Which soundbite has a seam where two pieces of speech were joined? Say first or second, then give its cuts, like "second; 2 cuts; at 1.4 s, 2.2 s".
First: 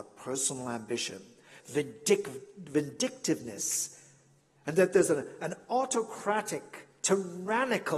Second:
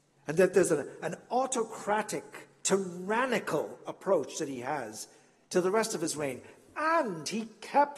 first; 1 cut; at 1.6 s